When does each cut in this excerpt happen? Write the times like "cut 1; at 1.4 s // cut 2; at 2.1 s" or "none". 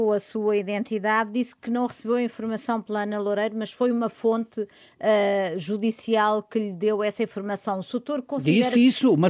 none